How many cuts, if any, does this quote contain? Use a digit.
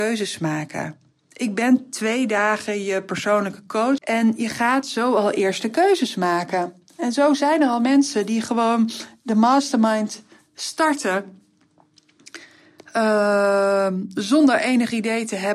1